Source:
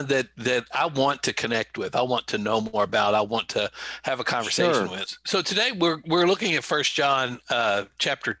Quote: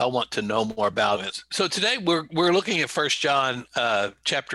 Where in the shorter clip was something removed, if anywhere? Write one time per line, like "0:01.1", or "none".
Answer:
0:01.2